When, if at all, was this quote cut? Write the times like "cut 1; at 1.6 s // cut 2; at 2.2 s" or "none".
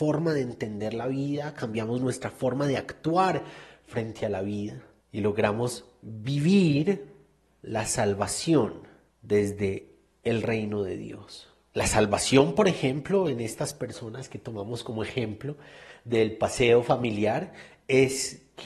none